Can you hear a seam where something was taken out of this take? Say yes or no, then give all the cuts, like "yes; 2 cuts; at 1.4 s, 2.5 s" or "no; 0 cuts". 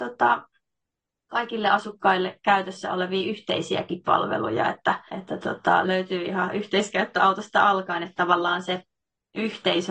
yes; 1 cut; at 5.1 s